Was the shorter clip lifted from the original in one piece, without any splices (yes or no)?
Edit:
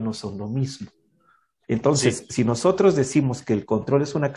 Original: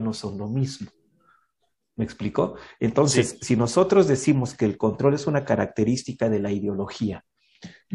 no